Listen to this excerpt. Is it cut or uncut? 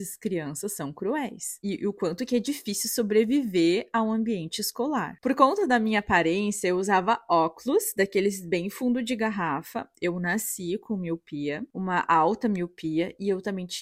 cut